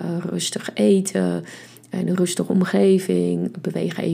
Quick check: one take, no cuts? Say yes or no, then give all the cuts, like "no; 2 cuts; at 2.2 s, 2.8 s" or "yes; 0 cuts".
yes; 0 cuts